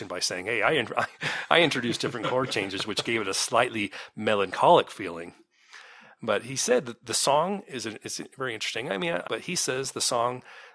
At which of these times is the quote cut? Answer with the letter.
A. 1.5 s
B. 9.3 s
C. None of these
B